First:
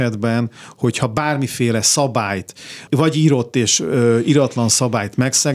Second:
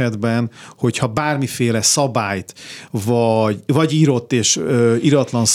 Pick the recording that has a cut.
first; 1 cut; at 2.9 s

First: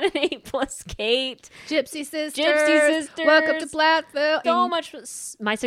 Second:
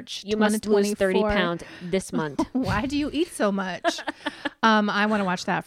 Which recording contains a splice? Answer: first; 1 cut; at 4.4 s

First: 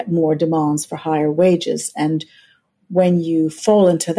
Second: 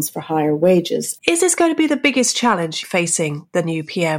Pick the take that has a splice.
second; 2 cuts; at 1.2 s, 2.8 s

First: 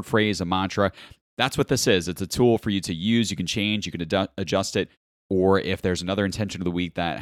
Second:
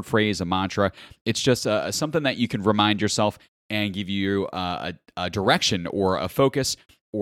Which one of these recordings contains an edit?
first; 1 cut; at 1.2 s

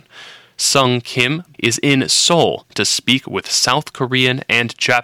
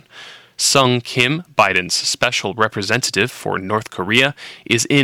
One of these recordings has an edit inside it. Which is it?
first; 1 cut; at 1.5 s

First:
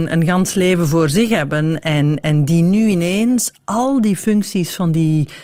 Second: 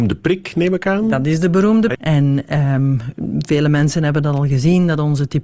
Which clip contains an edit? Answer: second; 1 cut; at 1.9 s

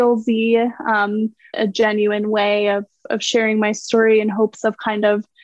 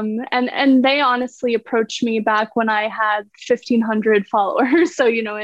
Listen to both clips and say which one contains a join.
first; 1 cut; at 1.5 s

